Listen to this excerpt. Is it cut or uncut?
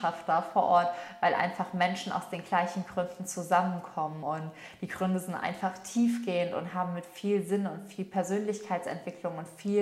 uncut